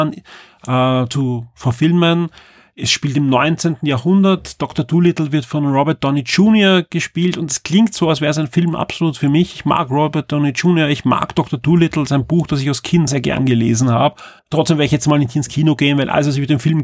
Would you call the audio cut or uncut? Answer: cut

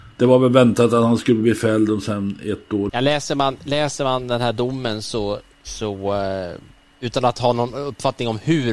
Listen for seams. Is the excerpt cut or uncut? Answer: cut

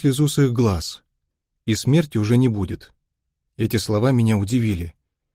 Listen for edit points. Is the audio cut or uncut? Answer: cut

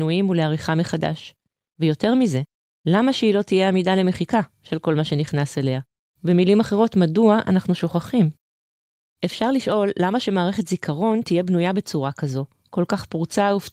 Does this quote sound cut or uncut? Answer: cut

